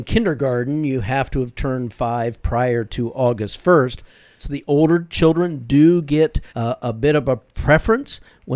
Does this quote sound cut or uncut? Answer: cut